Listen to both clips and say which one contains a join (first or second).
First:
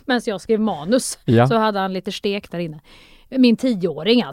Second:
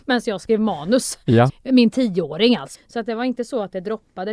second